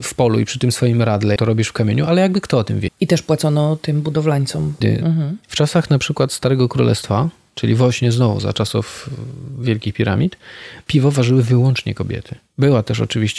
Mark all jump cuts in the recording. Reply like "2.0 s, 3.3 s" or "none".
1.4 s, 2.9 s, 4.8 s